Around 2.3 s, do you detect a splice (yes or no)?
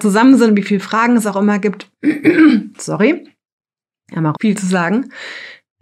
no